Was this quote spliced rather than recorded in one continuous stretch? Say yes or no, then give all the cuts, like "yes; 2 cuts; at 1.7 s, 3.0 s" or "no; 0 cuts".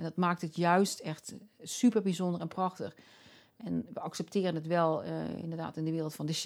no; 0 cuts